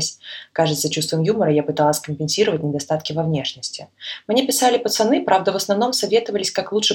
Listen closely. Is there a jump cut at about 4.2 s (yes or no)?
no